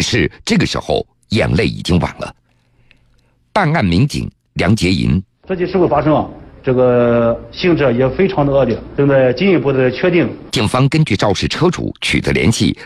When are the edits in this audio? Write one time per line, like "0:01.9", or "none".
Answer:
0:10.5

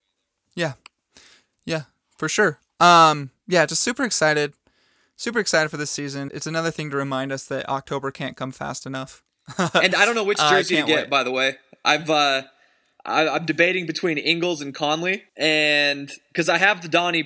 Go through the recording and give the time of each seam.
0:06.3
0:15.3

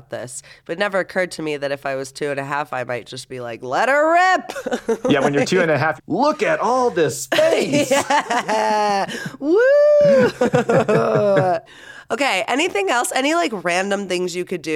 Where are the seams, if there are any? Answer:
0:06.0

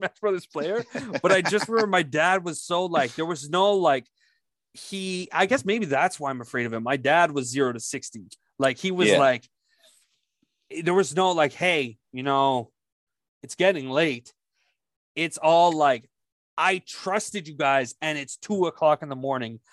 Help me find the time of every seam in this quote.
none

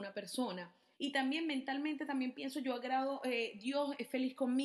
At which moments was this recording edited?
0:00.9

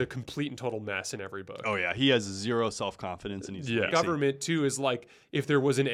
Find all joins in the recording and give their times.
0:03.9

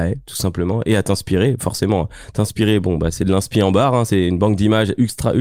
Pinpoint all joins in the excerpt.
none

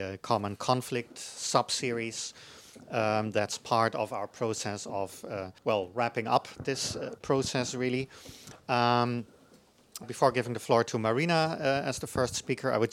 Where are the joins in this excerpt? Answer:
0:05.6
0:10.0

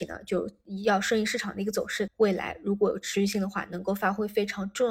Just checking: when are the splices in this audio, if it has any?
0:02.1

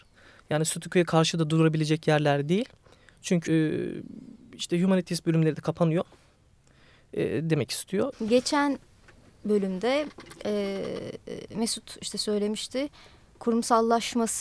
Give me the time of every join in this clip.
0:03.5
0:08.1

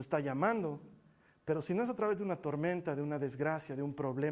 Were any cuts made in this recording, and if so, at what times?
none

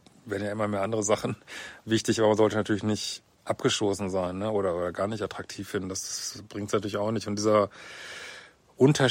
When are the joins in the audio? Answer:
none

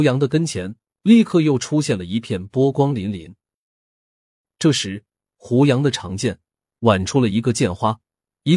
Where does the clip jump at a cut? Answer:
none

